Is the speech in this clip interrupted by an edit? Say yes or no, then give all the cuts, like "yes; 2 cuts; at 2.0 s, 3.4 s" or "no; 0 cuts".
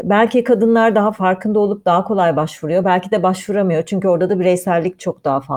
no; 0 cuts